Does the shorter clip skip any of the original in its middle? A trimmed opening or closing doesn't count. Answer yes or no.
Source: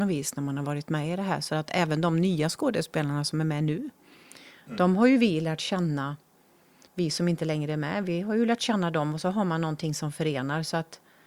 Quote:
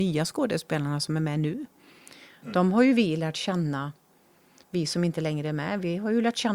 no